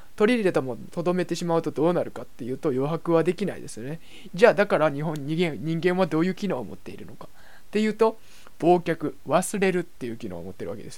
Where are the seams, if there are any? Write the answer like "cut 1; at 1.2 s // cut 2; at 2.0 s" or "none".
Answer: cut 1; at 4.3 s